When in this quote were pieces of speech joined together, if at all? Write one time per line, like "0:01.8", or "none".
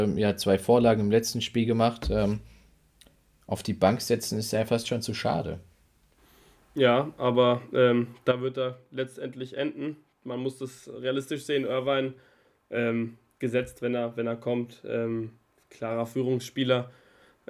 none